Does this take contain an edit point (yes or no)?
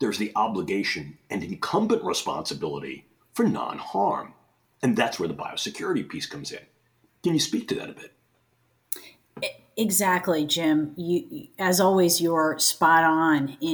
no